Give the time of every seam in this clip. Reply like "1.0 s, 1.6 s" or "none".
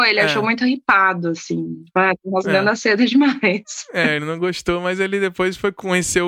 none